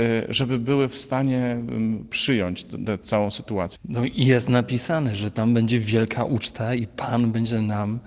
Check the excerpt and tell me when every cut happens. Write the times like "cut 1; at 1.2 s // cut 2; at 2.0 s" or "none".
cut 1; at 3.8 s